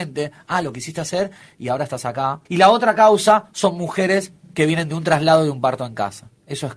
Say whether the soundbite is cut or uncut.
cut